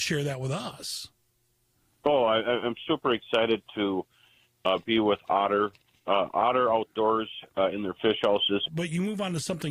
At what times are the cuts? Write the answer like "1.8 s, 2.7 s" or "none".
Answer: 8.7 s